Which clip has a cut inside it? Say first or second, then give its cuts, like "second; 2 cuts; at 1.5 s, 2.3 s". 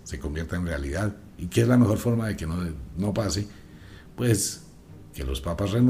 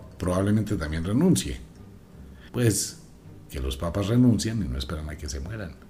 second; 1 cut; at 2.5 s